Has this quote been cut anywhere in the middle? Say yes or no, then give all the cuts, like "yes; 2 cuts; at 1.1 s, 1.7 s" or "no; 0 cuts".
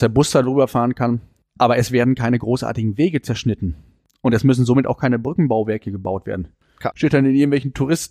yes; 1 cut; at 6.9 s